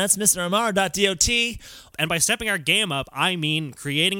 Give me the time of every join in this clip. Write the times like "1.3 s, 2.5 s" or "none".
1.9 s